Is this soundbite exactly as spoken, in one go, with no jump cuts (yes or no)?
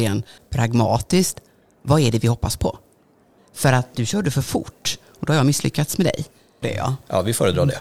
no